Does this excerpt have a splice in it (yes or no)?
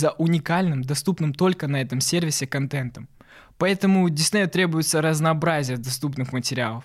no